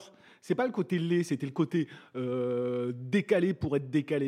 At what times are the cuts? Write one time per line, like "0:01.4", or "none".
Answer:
none

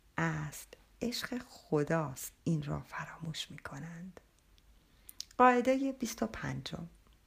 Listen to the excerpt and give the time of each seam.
0:02.4

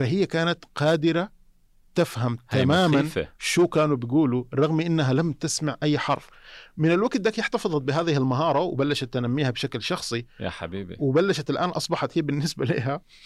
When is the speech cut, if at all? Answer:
none

